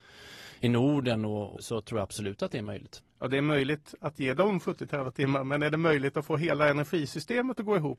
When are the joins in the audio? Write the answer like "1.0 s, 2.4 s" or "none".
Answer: 1.6 s